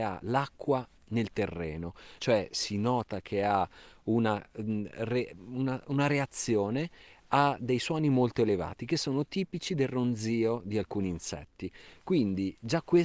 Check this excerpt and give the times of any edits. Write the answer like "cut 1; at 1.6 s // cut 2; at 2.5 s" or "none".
cut 1; at 2.2 s